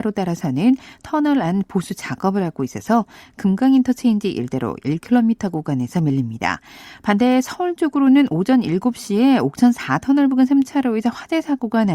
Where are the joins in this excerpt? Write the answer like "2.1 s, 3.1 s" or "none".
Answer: none